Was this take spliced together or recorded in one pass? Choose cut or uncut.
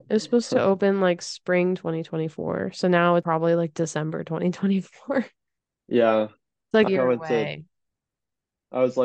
cut